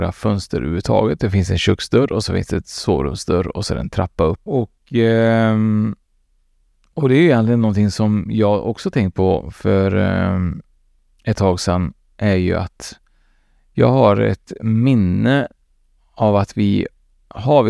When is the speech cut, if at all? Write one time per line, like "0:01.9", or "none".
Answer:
0:04.5